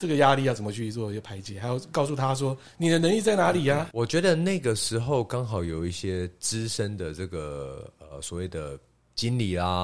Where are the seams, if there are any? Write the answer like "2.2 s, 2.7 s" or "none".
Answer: 3.9 s